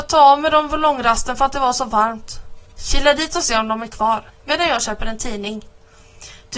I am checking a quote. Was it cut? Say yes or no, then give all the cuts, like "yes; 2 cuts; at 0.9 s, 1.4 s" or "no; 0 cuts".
yes; 1 cut; at 4.3 s